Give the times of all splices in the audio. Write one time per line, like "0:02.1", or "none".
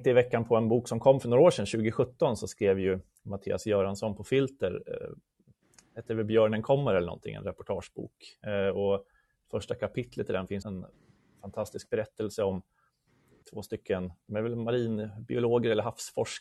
0:10.6